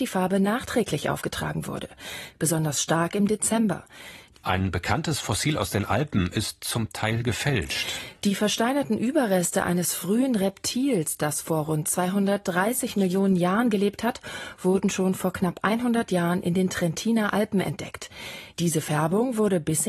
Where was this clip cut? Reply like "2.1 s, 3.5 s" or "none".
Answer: 2.3 s, 4.3 s, 18.5 s